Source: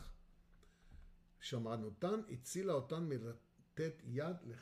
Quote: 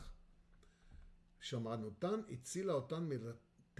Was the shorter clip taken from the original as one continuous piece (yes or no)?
yes